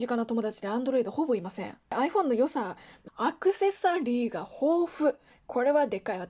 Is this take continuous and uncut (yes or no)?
no